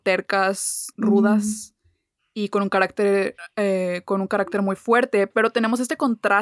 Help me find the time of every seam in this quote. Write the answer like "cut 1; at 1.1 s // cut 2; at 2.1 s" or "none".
cut 1; at 0.9 s